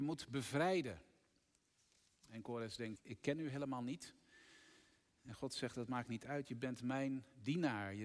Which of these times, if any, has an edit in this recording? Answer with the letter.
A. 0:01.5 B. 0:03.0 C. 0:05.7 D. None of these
B